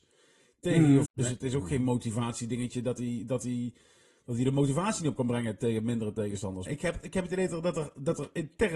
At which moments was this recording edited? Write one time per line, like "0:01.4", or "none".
0:01.1
0:06.7